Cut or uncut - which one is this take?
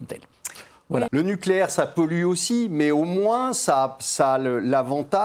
cut